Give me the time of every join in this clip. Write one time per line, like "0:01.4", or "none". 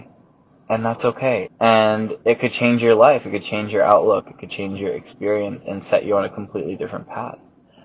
0:01.5